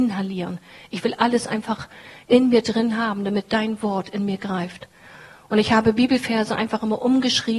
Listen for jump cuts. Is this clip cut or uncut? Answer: uncut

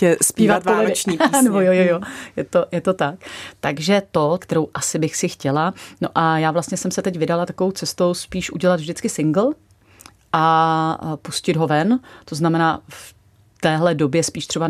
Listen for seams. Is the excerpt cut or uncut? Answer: cut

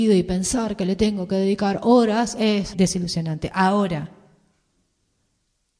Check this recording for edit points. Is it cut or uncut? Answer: cut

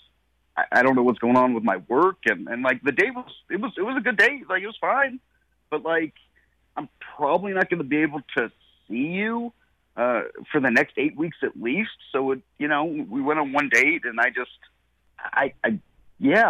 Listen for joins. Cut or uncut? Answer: uncut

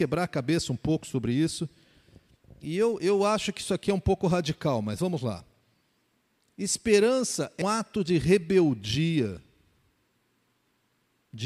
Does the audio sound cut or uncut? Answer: cut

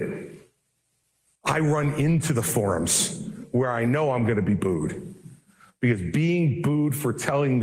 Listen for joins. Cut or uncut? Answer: cut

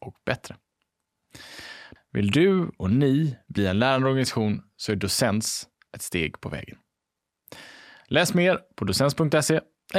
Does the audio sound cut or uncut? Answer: cut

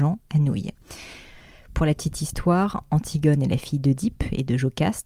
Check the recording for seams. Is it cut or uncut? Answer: uncut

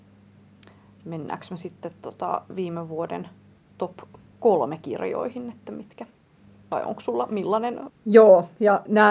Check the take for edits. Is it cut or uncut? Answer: cut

